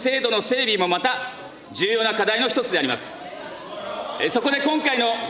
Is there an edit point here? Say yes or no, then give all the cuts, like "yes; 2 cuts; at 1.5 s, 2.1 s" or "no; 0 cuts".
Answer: no; 0 cuts